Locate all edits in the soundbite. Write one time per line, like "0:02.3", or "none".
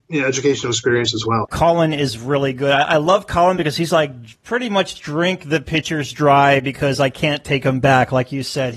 0:01.4